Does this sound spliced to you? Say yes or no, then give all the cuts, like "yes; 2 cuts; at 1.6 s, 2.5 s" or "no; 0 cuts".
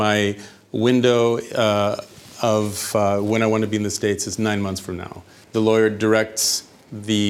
yes; 1 cut; at 5.4 s